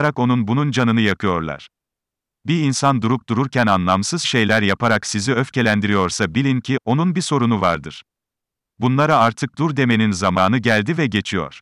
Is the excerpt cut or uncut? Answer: cut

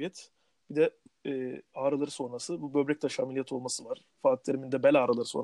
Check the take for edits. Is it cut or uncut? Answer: cut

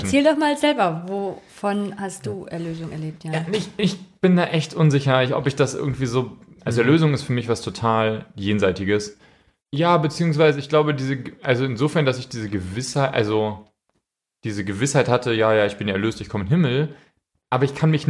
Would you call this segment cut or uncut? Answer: cut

